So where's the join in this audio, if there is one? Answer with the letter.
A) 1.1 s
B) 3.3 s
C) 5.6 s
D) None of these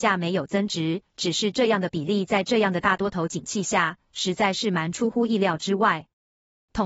D